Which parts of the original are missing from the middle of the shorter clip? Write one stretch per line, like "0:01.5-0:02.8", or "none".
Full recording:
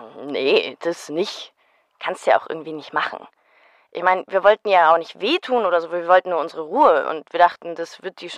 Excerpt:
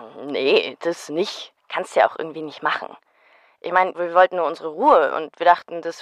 0:01.6-0:01.9
0:04.2-0:05.9